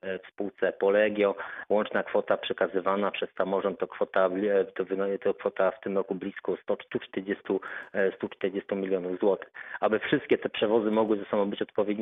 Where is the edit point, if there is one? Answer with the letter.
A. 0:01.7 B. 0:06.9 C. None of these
B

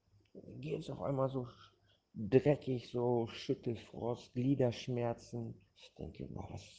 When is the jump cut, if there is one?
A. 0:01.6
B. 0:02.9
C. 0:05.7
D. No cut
C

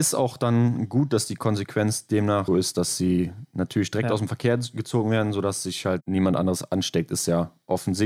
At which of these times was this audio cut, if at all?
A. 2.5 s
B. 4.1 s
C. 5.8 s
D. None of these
A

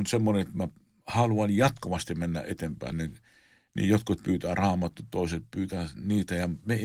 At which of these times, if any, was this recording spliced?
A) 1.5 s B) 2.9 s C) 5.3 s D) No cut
B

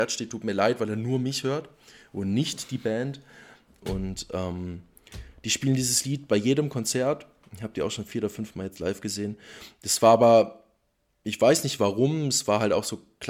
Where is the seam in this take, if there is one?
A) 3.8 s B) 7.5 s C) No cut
A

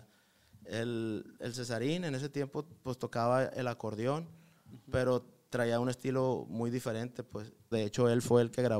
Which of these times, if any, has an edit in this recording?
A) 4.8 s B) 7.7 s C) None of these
B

